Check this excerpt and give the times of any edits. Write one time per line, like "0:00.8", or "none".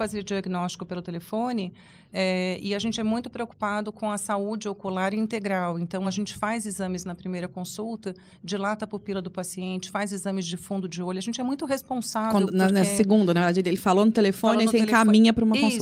none